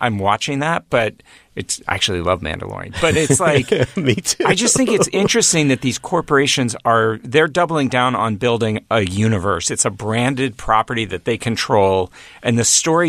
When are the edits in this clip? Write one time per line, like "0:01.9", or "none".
none